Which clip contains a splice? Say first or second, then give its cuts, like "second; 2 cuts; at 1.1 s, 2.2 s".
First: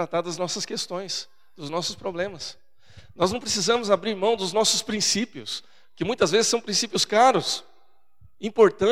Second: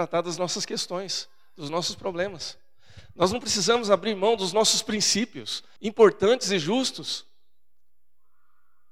second; 1 cut; at 5.8 s